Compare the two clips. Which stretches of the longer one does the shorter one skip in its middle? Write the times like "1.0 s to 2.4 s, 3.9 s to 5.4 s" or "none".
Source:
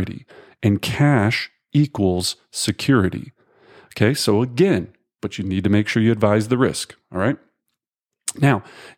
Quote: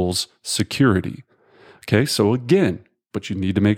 none